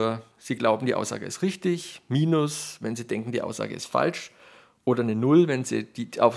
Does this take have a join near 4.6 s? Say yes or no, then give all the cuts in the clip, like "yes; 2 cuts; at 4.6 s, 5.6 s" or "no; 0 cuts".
no; 0 cuts